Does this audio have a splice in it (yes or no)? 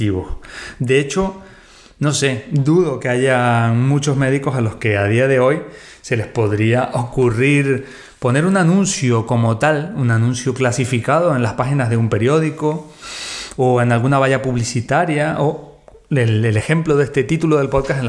no